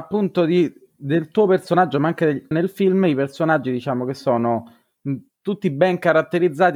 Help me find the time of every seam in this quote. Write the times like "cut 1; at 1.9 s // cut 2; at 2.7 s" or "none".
cut 1; at 2.5 s